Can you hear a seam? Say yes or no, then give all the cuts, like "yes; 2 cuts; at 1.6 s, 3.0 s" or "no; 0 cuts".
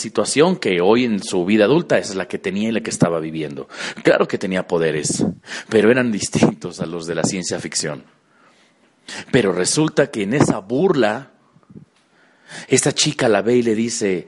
no; 0 cuts